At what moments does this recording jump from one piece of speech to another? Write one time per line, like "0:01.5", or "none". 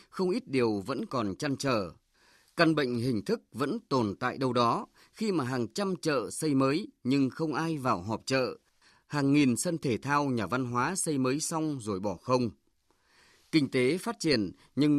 none